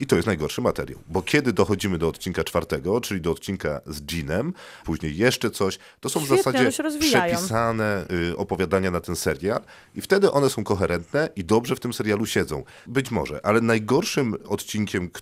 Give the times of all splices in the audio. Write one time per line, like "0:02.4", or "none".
0:04.8
0:12.9

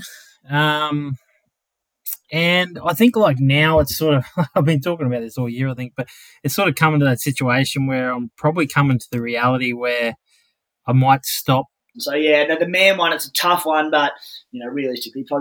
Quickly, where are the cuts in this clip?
0:11.9

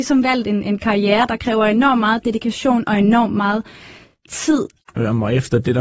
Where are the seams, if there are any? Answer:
0:04.8

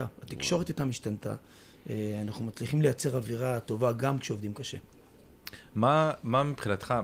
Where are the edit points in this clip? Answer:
none

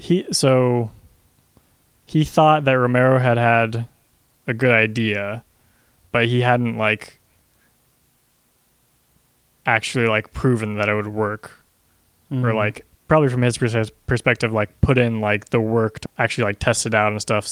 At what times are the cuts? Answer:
0:12.9
0:16.1

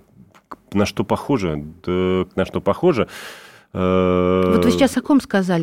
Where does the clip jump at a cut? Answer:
0:02.4

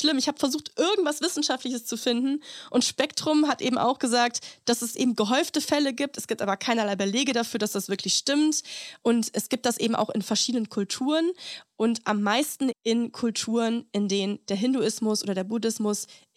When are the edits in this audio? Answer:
0:09.0
0:12.7

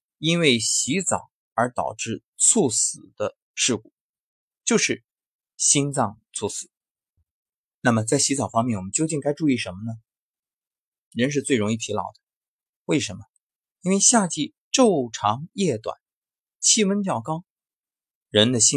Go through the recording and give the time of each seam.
0:06.2
0:11.0

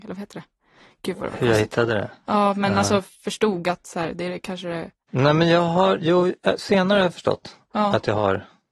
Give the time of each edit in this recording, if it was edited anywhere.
none

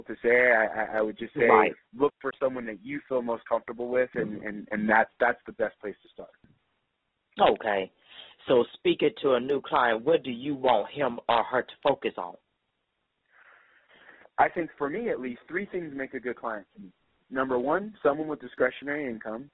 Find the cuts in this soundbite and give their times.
0:04.7

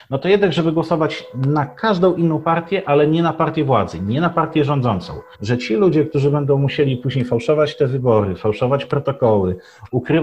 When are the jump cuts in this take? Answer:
0:05.3

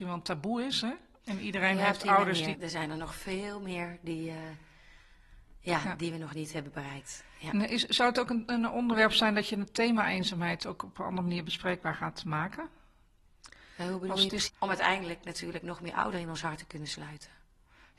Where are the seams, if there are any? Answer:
0:02.5
0:14.5

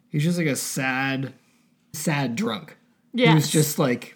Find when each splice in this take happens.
0:01.9

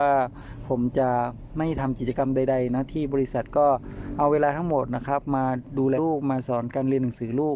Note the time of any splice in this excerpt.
0:06.0

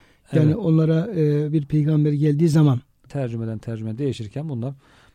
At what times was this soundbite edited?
0:03.1

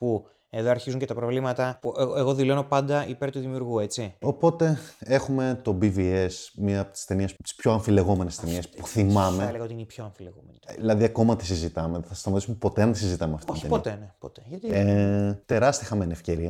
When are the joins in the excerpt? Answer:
0:04.2
0:07.4

